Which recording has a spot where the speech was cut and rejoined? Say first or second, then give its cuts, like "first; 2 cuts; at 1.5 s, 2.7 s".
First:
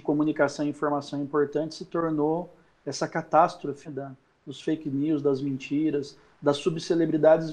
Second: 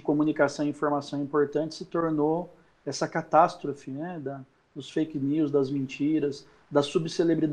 first; 1 cut; at 3.8 s